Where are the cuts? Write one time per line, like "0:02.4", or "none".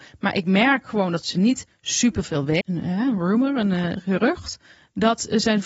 0:02.6